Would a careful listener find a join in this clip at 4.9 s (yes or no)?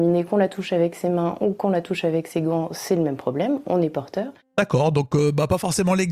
no